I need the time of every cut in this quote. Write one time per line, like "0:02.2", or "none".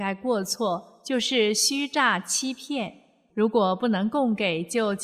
0:03.3